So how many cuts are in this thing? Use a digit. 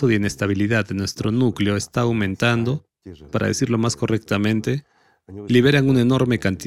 1